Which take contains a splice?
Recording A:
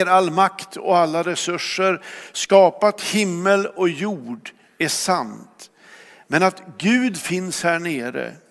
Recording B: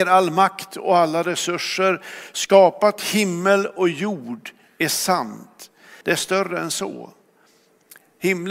B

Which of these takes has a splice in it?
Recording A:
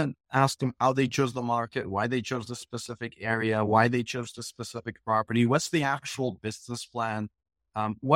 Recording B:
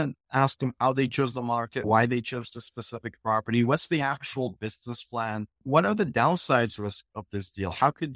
B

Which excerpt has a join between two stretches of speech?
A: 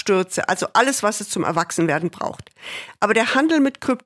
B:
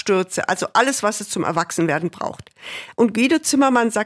B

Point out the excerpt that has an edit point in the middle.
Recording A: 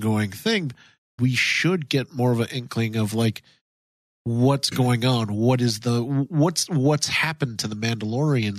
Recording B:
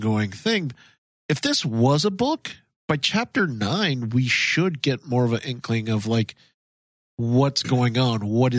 A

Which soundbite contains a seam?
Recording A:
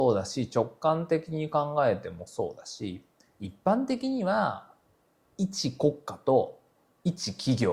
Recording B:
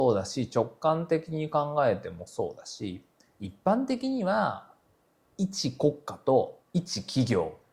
B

